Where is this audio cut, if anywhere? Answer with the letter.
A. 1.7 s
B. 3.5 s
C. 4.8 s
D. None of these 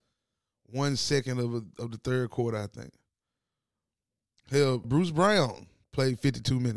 C